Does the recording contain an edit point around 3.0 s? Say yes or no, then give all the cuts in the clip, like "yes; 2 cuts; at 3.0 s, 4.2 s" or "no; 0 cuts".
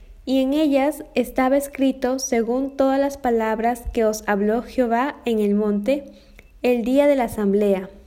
no; 1 cut; at 6.5 s